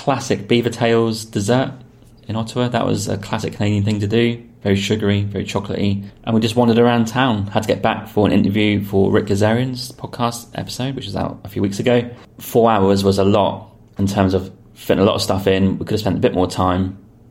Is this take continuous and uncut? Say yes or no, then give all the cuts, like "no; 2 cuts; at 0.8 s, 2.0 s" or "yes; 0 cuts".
yes; 0 cuts